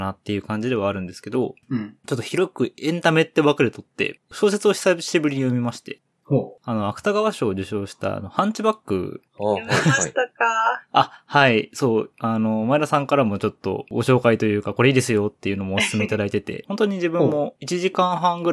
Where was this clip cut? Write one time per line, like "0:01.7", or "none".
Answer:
0:09.4
0:16.6